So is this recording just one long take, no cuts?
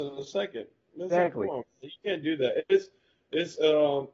yes; 0 cuts

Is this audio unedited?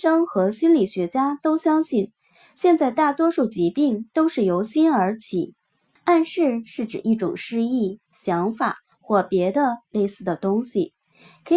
no; 2 cuts; at 6.0 s, 8.1 s

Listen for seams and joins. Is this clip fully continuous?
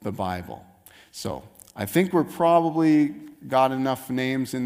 yes; 0 cuts

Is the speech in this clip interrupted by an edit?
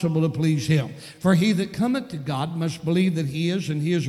no; 0 cuts

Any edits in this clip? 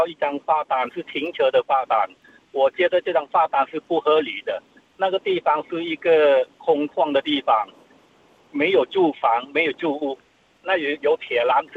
no; 0 cuts

